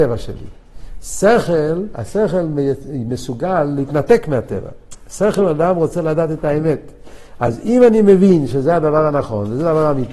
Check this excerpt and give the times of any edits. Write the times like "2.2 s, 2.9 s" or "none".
none